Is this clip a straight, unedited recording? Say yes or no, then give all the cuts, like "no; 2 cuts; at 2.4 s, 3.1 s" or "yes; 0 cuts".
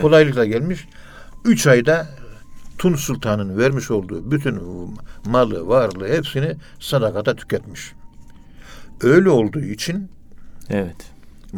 yes; 0 cuts